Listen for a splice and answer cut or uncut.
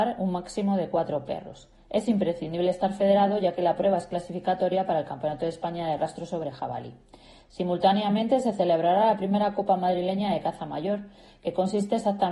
uncut